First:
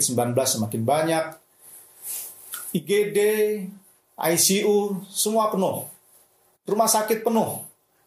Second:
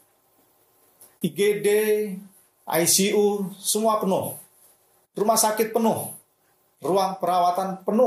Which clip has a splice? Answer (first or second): second